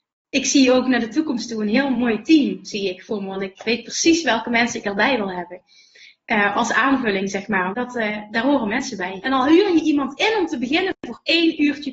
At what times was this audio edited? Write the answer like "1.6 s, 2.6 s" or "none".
7.7 s, 9.2 s